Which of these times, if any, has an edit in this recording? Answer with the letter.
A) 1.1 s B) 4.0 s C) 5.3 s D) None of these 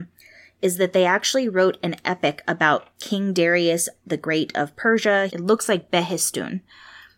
C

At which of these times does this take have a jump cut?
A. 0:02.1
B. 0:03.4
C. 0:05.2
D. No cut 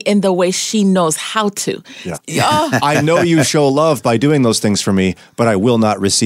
A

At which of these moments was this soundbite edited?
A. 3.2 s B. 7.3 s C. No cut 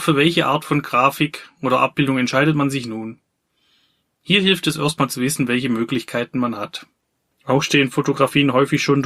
B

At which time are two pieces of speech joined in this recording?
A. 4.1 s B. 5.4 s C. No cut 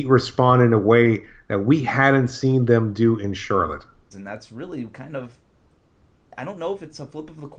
A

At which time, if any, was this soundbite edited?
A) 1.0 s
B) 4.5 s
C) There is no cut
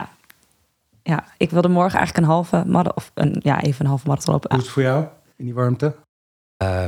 B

